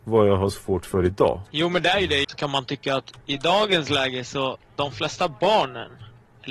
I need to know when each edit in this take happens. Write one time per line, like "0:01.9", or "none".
0:02.2

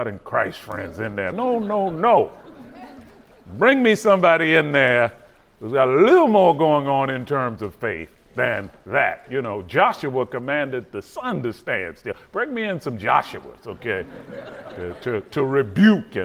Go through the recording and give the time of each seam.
0:01.3

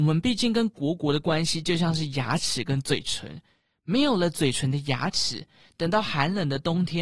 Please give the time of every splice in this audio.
none

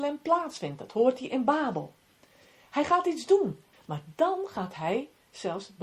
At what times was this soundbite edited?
0:03.7

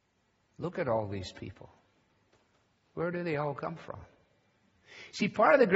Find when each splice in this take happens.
none

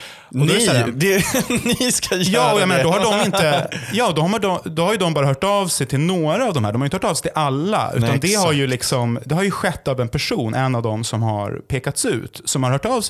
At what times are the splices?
none

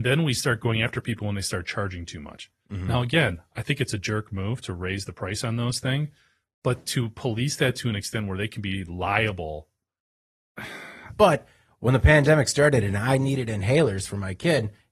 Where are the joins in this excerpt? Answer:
0:11.1

